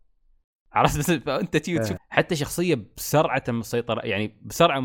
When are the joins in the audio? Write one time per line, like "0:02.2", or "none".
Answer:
0:02.0